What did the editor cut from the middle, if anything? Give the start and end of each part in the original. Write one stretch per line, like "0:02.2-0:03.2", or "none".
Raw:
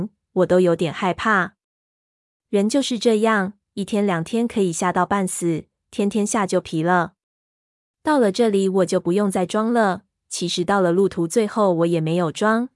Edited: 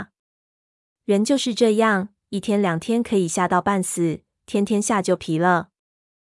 none